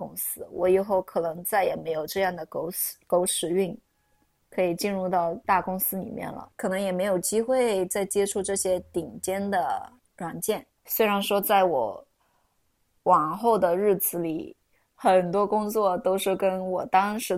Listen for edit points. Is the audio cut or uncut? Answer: cut